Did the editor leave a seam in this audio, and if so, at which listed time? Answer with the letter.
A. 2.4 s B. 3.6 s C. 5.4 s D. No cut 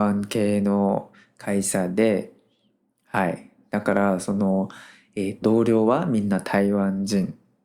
C